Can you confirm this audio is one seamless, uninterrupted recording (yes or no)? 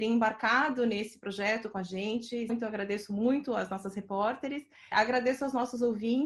no